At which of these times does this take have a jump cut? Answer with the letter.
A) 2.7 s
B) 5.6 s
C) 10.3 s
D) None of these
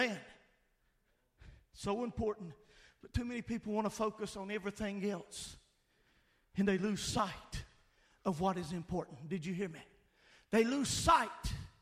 D